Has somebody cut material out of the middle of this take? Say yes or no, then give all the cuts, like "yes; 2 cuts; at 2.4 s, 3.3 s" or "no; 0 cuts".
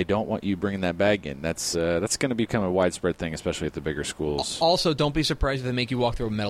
no; 0 cuts